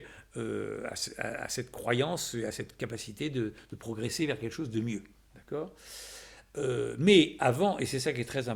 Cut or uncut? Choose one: uncut